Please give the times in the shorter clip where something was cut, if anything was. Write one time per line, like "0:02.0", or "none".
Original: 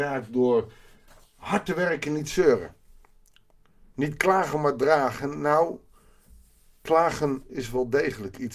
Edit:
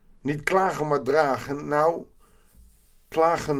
none